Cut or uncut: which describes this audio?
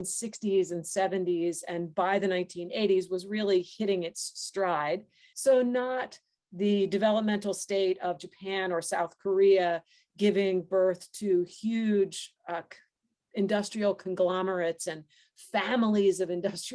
cut